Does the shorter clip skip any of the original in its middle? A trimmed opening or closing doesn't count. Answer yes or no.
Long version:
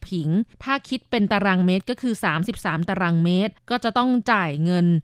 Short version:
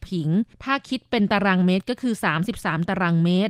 no